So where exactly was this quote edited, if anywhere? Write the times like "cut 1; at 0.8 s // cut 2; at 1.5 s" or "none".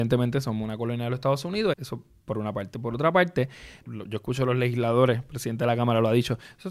cut 1; at 1.7 s // cut 2; at 3.8 s